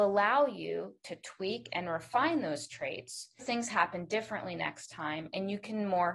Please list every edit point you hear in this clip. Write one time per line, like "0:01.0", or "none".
0:03.4